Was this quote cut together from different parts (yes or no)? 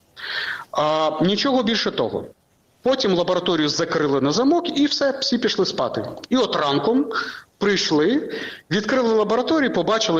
no